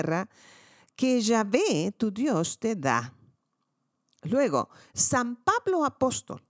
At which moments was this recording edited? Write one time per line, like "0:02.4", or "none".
none